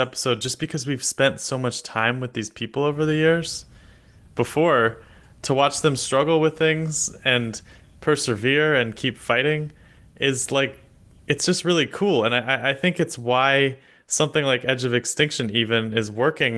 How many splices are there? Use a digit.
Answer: 1